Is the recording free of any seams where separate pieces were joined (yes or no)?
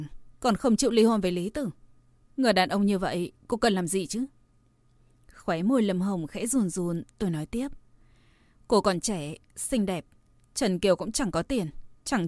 yes